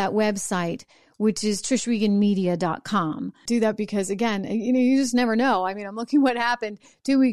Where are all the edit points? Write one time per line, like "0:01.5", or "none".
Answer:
0:03.5